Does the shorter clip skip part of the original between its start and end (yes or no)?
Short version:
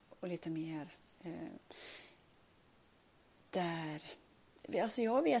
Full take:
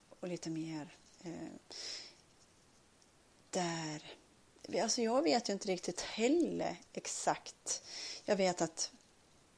no